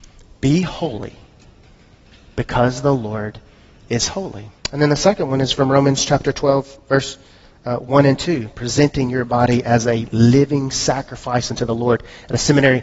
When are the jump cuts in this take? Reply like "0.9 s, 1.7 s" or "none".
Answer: 4.6 s